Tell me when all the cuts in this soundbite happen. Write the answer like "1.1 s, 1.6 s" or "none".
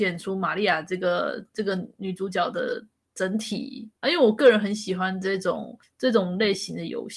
4.0 s